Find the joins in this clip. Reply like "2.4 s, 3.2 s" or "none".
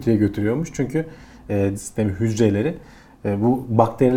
1.7 s